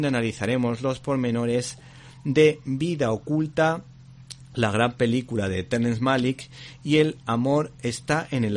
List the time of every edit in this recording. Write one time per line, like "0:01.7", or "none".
none